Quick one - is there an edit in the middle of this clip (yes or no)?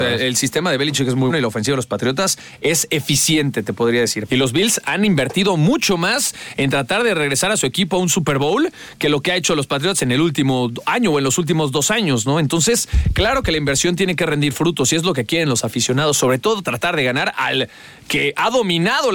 yes